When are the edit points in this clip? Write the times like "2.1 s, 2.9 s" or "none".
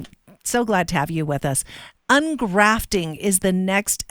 none